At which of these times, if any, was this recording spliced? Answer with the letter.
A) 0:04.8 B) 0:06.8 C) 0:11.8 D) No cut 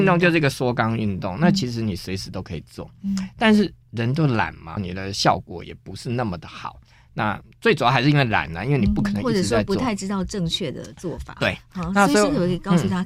A